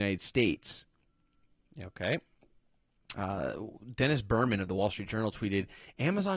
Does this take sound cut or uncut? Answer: uncut